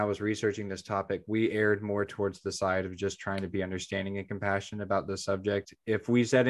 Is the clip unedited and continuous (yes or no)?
yes